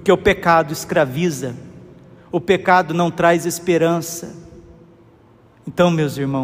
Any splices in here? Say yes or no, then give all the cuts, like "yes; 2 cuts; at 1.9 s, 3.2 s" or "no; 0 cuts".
no; 0 cuts